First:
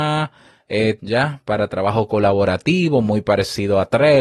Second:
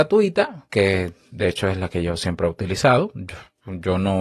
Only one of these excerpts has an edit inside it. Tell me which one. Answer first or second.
first